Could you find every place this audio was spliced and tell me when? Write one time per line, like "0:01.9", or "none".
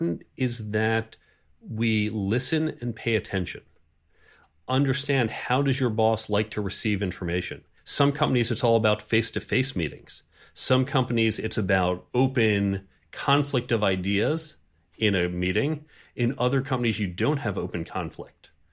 0:07.8